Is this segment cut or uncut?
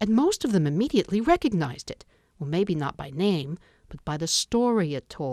uncut